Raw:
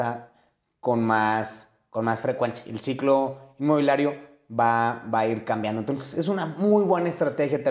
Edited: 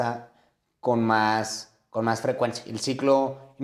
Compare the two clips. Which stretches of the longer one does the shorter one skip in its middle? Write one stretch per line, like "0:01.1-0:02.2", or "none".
none